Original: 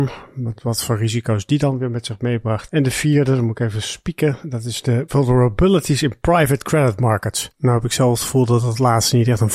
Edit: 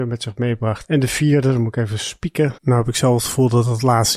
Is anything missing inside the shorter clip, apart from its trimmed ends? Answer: yes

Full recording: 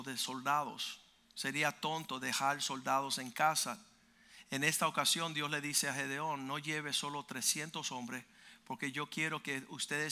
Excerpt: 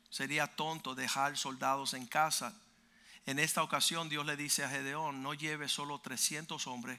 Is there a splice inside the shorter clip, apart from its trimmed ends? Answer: no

